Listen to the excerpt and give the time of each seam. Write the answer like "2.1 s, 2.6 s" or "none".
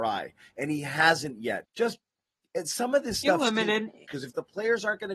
1.6 s, 4.1 s

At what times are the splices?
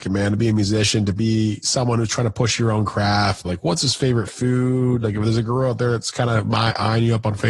3.4 s

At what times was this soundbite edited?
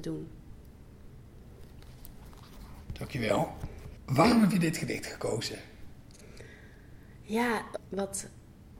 7.8 s

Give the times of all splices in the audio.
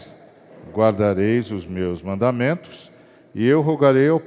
none

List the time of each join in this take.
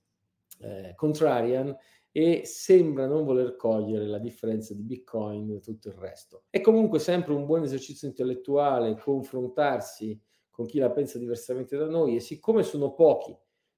6.5 s

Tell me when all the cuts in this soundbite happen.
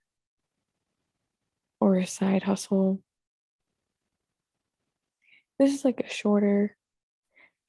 none

